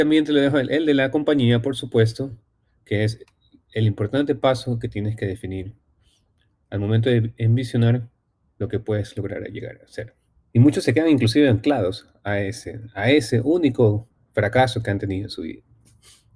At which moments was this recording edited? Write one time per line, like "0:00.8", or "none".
0:10.5